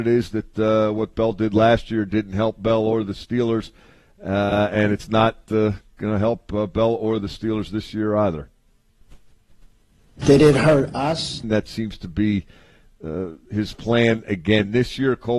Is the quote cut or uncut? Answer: cut